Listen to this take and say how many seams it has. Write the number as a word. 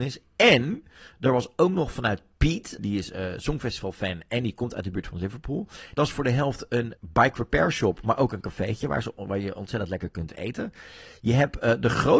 three